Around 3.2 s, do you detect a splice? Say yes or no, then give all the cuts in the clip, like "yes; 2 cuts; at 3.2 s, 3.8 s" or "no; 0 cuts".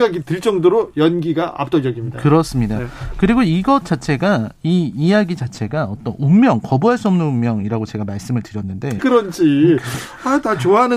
no; 1 cut; at 9.0 s